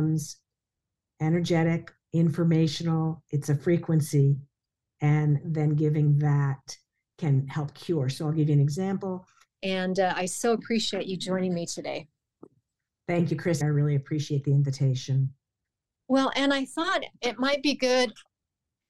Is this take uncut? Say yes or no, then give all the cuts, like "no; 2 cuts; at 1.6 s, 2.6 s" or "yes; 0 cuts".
no; 2 cuts; at 9.5 s, 13.6 s